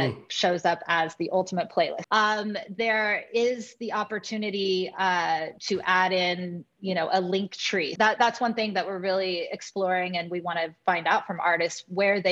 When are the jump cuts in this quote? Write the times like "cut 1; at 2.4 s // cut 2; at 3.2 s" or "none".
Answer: cut 1; at 2.0 s // cut 2; at 5.6 s // cut 3; at 8.0 s